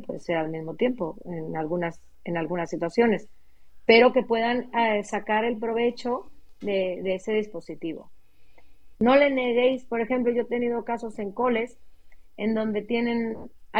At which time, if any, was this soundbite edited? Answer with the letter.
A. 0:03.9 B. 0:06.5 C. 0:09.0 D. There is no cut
C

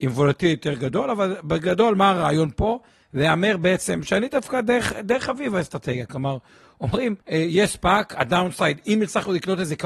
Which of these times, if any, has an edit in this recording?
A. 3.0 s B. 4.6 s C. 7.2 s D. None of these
C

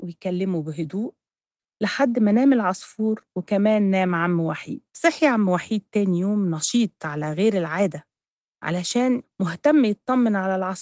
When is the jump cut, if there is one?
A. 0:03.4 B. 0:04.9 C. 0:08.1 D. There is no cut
B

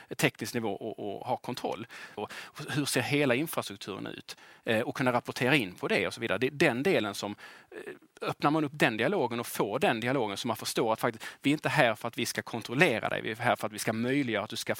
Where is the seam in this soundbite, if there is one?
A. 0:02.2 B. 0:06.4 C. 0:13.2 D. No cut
A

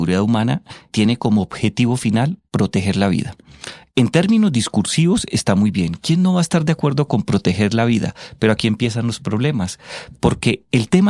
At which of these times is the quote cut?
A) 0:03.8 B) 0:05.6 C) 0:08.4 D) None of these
D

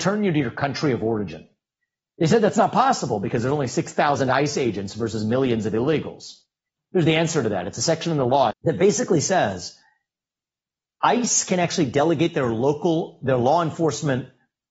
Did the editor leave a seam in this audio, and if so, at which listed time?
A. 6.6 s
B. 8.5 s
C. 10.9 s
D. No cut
B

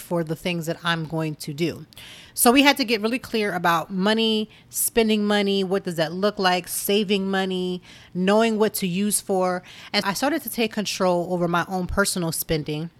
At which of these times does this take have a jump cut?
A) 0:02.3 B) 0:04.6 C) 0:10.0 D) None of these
C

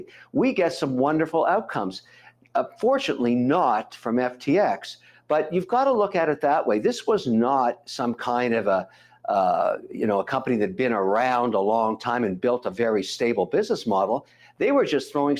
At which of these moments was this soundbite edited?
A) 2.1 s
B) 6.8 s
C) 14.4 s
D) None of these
D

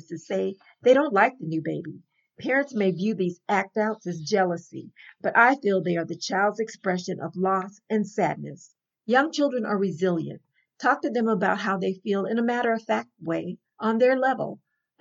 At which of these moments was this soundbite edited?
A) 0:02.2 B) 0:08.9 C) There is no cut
B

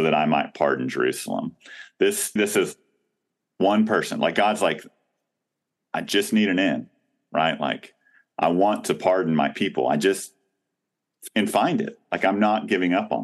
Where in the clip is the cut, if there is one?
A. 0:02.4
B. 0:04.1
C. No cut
A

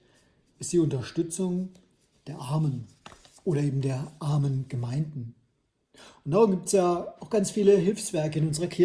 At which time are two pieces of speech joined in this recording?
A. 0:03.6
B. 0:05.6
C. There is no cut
C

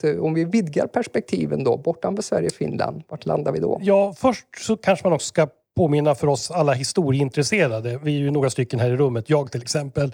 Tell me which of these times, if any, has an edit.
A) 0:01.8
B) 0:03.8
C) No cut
C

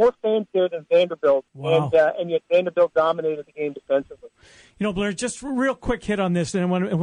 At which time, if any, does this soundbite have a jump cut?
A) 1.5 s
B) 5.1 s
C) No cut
A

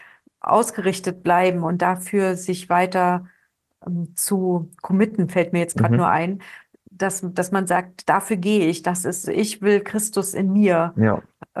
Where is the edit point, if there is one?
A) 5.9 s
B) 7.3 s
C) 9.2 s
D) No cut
C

